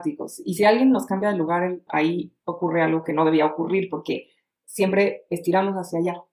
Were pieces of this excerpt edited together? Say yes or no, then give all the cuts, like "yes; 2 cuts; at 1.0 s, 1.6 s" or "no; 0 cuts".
yes; 1 cut; at 1.9 s